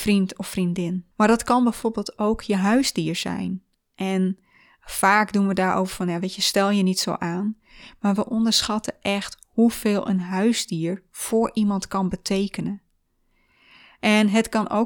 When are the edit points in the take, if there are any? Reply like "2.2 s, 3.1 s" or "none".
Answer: 1.1 s